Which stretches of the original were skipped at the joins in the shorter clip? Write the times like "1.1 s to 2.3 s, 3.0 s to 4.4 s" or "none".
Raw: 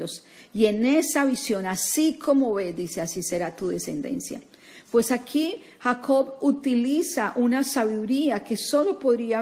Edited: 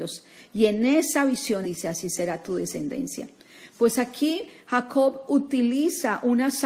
1.6 s to 2.8 s